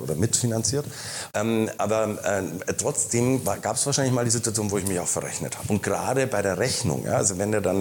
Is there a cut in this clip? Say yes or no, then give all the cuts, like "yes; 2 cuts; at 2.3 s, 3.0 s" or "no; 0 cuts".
yes; 2 cuts; at 1.3 s, 5.7 s